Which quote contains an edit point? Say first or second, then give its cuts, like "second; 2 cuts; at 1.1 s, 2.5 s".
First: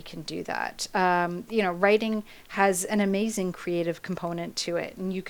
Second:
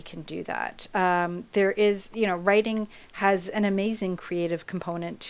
first; 1 cut; at 1.5 s